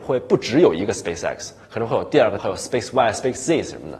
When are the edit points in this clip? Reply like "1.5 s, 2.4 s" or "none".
2.4 s

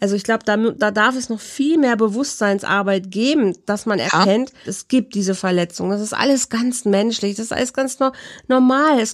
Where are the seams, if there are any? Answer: 4.6 s

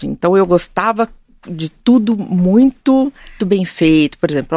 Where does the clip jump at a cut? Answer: 3.4 s

